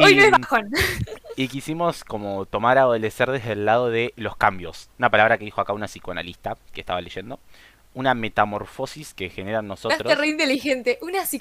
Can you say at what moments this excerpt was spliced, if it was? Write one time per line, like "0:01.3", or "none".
0:04.9